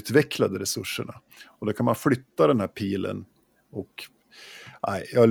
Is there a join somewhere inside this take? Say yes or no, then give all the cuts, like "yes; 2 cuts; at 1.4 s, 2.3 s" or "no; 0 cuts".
no; 0 cuts